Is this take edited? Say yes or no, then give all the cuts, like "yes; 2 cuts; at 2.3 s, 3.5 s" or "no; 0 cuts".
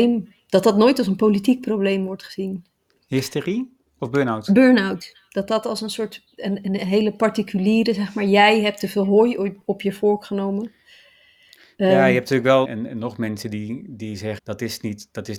yes; 2 cuts; at 12.7 s, 14.4 s